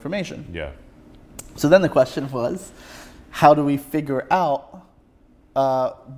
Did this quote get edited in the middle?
no; 0 cuts

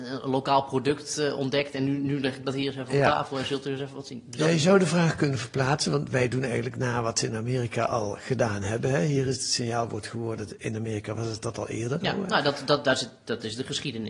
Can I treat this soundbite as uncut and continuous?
no; 1 cut; at 12.0 s

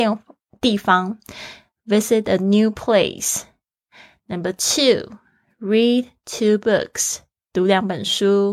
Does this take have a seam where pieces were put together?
no; 0 cuts

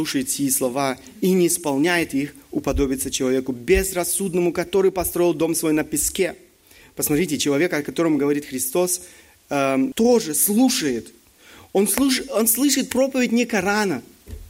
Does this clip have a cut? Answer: yes; 1 cut; at 9.9 s

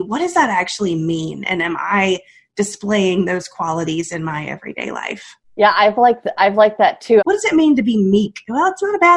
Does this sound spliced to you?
yes; 2 cuts; at 5.4 s, 7.2 s

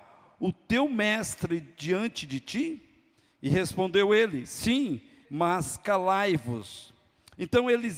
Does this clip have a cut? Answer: yes; 1 cut; at 5.2 s

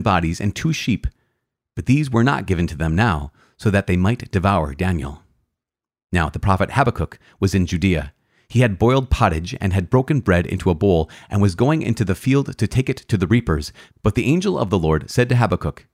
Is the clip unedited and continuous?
yes; 0 cuts

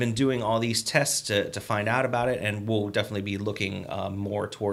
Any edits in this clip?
no; 0 cuts

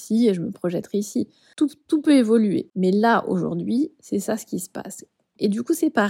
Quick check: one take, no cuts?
yes; 0 cuts

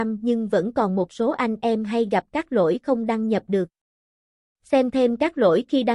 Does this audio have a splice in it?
no; 0 cuts

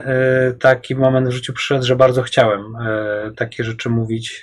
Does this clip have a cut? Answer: yes; 1 cut; at 3.3 s

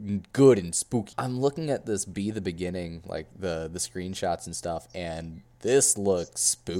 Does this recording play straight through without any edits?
no; 1 cut; at 1.1 s

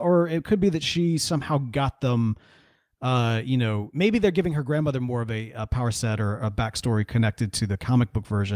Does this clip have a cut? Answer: no; 0 cuts

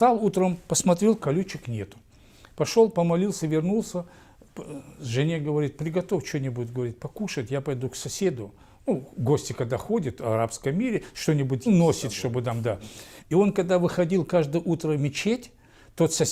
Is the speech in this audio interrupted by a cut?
yes; 2 cuts; at 11.7 s, 13.2 s

